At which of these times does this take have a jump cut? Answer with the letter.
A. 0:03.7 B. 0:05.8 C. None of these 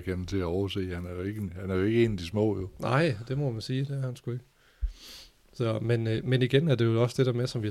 C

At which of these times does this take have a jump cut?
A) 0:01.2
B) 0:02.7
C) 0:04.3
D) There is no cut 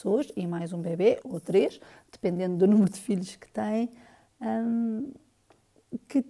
A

